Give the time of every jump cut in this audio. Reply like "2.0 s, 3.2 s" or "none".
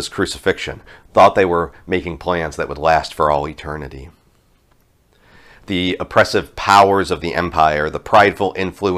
none

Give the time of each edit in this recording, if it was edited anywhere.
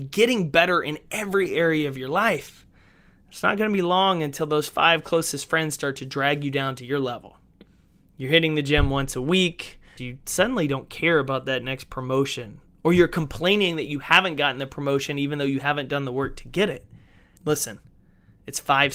10.0 s, 17.4 s

